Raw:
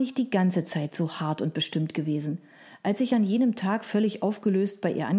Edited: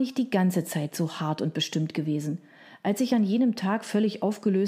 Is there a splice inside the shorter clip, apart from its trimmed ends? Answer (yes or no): no